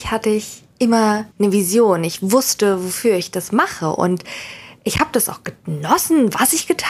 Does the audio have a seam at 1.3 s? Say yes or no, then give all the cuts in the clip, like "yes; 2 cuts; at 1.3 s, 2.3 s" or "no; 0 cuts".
yes; 1 cut; at 1.3 s